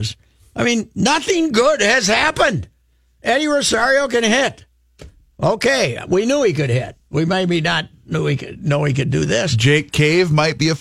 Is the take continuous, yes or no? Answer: yes